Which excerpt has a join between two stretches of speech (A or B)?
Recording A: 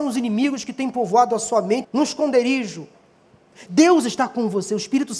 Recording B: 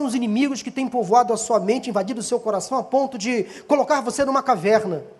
A